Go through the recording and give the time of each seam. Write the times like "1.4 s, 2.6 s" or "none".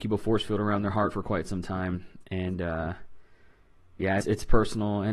4.2 s